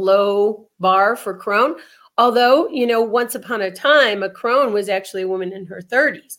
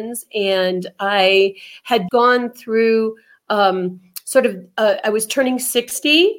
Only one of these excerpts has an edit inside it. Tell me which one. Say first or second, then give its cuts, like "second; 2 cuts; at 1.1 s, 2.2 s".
second; 1 cut; at 2.1 s